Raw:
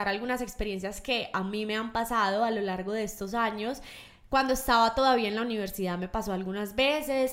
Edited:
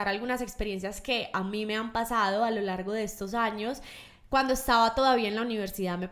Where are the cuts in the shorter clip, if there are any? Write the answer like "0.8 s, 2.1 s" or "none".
none